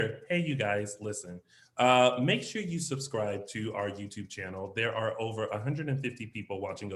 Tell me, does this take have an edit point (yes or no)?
no